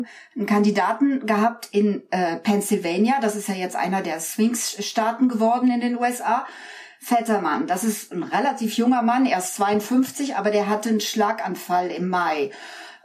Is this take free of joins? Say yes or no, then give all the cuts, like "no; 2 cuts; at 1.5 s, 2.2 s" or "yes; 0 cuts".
yes; 0 cuts